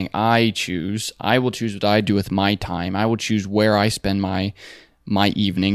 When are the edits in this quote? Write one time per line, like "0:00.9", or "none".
none